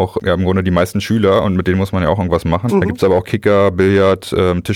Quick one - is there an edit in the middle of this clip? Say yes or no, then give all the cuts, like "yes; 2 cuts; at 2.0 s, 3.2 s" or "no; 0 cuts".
yes; 1 cut; at 2.7 s